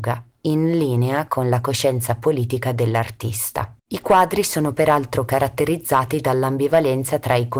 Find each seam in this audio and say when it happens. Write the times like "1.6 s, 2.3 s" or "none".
3.8 s